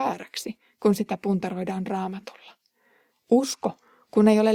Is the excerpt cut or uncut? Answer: cut